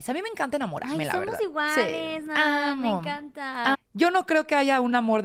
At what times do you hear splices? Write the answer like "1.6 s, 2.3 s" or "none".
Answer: 3.7 s